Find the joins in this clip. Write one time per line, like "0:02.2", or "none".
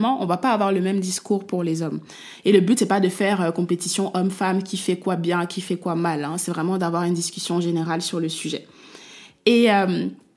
none

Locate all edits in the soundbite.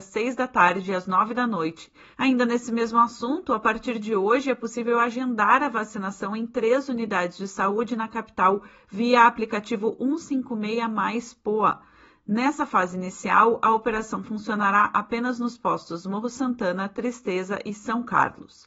0:02.1

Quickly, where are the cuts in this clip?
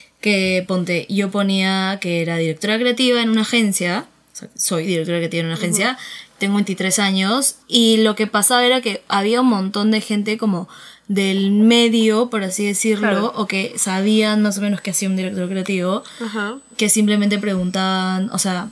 0:07.6

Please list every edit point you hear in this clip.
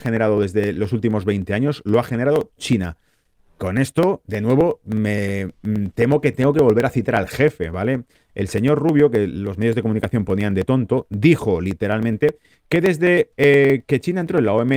none

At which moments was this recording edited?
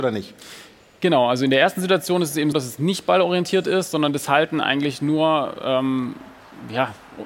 0:02.5

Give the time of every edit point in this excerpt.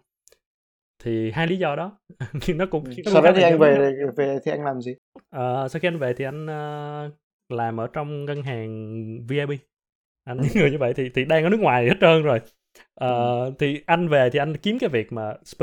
0:10.4

